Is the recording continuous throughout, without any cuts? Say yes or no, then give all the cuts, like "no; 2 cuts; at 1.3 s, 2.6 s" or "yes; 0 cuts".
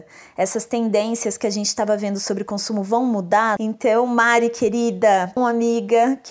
no; 2 cuts; at 3.6 s, 5.4 s